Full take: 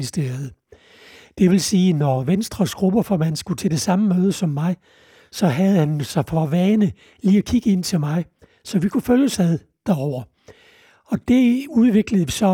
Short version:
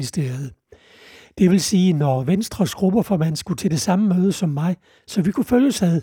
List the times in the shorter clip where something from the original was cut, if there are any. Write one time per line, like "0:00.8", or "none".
0:05.0